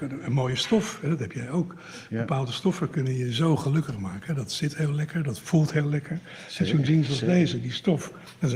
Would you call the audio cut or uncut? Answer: uncut